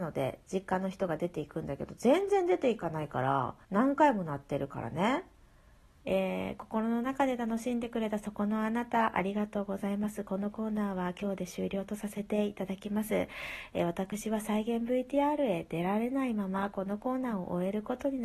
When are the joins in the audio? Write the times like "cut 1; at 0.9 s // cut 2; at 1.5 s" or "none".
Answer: cut 1; at 3.6 s // cut 2; at 6.0 s